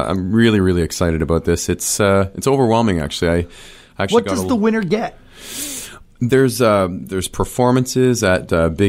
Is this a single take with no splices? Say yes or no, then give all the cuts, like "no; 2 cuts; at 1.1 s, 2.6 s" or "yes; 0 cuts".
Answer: yes; 0 cuts